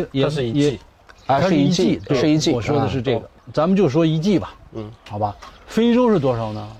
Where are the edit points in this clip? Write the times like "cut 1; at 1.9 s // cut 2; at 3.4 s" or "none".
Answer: none